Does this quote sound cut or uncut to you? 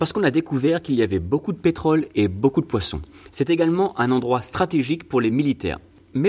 uncut